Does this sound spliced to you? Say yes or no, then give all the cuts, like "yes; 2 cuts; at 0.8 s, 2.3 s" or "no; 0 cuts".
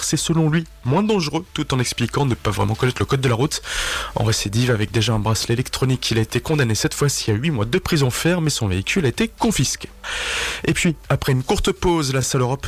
no; 0 cuts